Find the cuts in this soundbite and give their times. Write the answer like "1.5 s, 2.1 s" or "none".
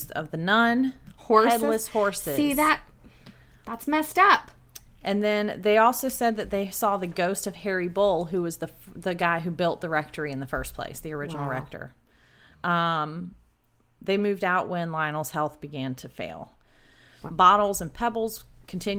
1.2 s, 17.3 s